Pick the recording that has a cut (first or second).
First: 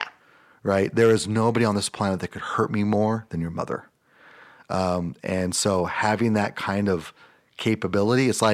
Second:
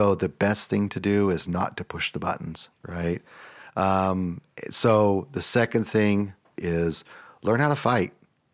second